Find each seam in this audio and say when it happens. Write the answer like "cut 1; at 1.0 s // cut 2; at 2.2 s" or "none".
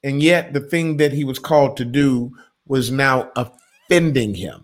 none